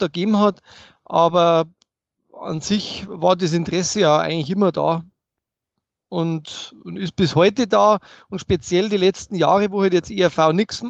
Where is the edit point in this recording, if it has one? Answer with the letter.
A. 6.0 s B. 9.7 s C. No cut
C